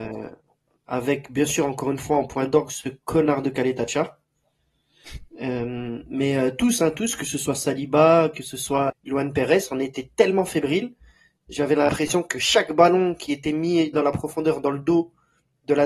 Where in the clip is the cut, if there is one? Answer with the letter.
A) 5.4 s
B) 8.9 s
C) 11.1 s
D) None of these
B